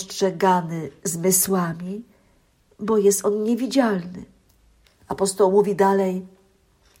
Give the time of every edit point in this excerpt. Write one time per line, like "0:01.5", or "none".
0:04.9